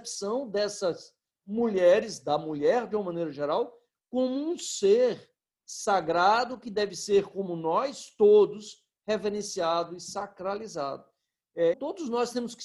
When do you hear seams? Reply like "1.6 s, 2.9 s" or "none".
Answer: 11.7 s